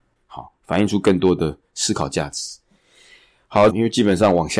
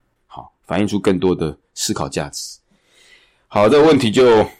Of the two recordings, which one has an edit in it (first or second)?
first